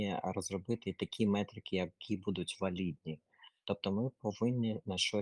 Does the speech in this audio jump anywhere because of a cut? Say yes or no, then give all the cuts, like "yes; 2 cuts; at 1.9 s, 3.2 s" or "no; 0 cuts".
yes; 1 cut; at 3.6 s